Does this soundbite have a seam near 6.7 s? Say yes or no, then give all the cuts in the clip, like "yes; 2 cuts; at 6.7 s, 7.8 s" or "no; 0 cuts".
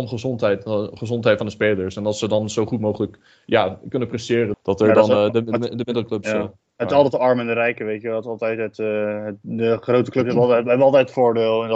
no; 1 cut; at 4.5 s